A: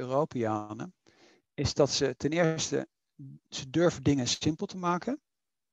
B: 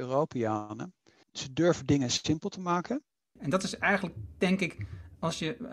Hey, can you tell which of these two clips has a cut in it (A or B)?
B